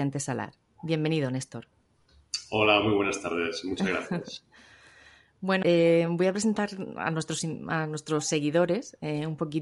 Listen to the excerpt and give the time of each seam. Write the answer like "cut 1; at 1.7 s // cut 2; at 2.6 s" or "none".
cut 1; at 5.6 s